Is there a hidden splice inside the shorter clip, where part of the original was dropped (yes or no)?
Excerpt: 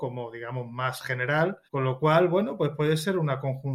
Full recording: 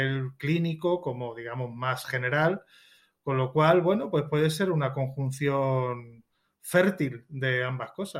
yes